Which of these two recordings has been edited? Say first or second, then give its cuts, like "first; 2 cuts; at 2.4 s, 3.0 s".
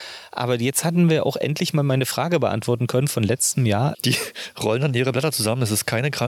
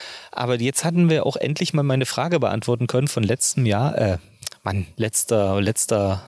first; 1 cut; at 3.9 s